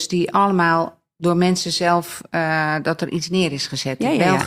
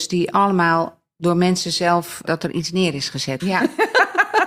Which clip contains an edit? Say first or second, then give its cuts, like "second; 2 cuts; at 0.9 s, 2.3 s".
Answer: second; 2 cuts; at 2.3 s, 3.4 s